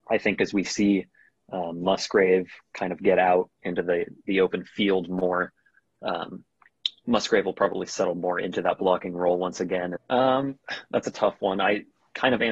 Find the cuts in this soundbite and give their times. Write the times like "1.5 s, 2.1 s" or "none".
10.0 s